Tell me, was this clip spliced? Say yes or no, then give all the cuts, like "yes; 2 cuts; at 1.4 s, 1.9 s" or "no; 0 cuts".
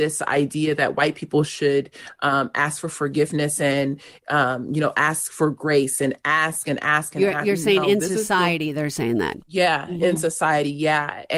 no; 0 cuts